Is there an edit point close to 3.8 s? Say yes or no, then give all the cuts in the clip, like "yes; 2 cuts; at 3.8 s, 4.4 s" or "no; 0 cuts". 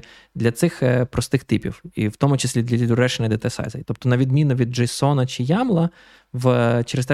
yes; 1 cut; at 3.8 s